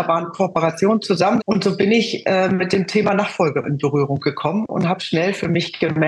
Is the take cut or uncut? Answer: cut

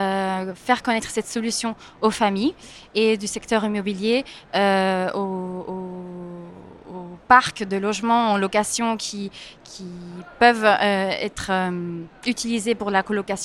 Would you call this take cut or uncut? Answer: cut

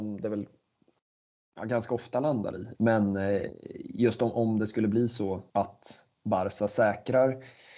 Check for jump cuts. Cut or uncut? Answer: cut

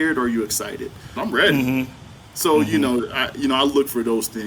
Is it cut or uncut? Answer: cut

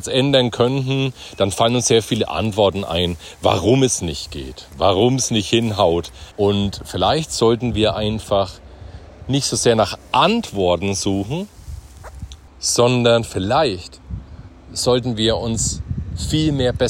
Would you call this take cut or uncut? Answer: cut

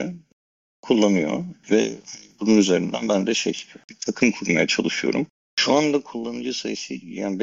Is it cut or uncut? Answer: cut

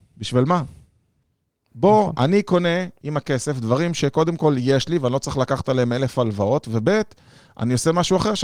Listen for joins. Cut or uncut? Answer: uncut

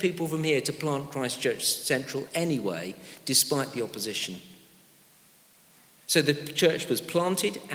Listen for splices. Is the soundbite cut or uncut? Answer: uncut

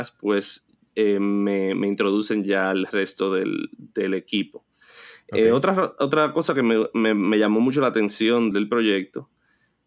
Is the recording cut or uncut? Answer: cut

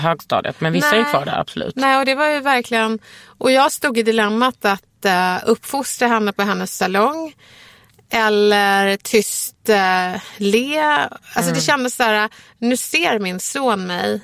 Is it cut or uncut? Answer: uncut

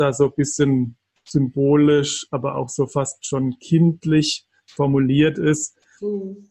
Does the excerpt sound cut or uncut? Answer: uncut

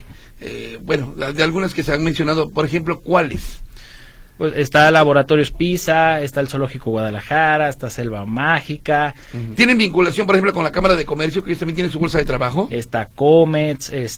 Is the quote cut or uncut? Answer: cut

